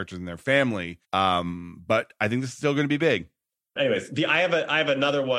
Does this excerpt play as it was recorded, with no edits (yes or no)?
no